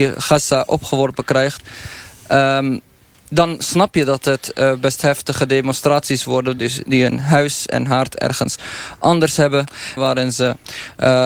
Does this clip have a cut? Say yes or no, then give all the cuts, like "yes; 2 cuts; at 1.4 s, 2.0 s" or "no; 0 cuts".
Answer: yes; 2 cuts; at 6.6 s, 10.0 s